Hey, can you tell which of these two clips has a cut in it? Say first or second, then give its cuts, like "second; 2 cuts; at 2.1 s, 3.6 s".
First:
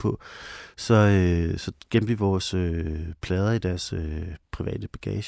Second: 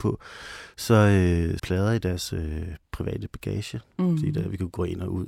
second; 1 cut; at 1.6 s